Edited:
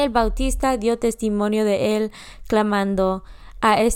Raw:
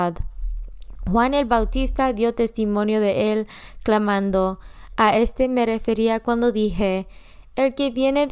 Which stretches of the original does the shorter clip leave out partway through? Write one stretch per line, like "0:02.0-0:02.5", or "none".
none